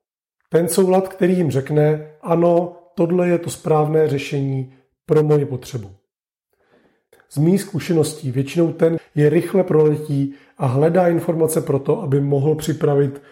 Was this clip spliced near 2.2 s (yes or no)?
no